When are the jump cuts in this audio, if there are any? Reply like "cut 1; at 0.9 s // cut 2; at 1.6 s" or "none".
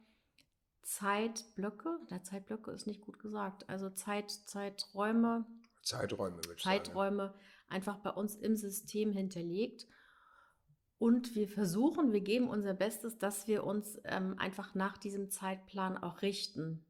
none